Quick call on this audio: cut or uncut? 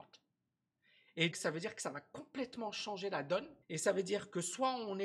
cut